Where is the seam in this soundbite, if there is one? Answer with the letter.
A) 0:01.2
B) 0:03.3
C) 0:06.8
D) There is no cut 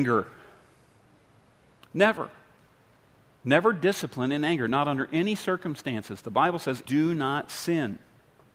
C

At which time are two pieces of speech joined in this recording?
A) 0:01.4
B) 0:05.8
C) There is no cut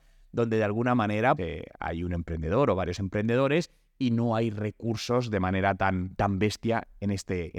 A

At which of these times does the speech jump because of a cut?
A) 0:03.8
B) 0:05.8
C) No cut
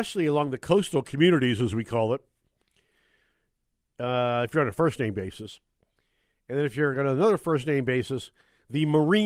C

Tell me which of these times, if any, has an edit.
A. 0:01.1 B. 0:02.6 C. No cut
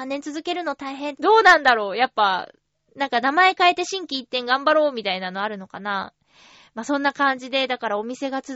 A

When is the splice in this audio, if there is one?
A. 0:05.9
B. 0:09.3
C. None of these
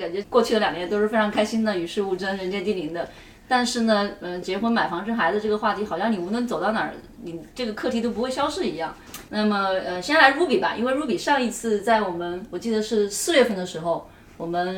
B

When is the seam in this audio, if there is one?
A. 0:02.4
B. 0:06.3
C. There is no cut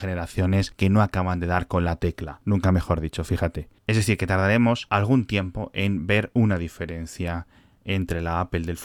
B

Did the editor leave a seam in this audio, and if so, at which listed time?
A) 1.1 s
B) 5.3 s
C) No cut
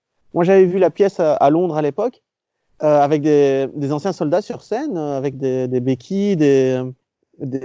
C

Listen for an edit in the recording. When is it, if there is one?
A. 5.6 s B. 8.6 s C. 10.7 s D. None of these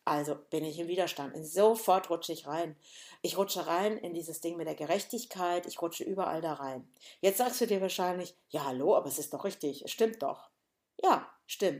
D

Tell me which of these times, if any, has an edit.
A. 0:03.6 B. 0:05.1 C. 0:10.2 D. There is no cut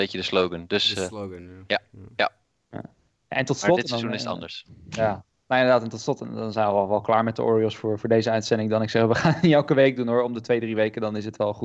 D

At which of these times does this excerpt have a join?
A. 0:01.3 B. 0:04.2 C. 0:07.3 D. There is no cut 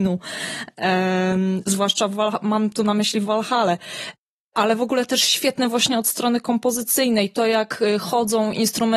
D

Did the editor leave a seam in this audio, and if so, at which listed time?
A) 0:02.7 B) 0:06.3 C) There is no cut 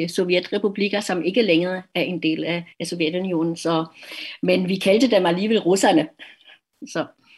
A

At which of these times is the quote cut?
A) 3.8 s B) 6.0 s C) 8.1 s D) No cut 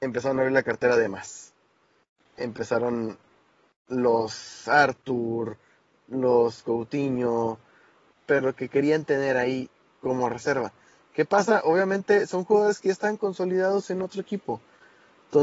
C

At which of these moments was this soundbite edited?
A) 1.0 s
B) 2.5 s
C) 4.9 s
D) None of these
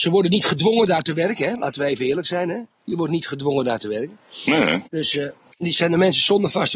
C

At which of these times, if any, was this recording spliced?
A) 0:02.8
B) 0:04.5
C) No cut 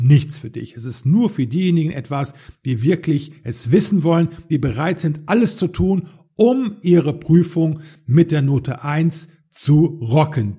C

